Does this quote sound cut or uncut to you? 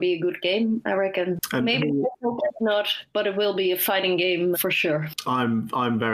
cut